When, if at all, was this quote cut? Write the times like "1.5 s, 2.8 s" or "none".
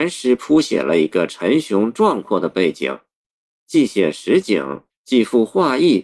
3.5 s, 4.9 s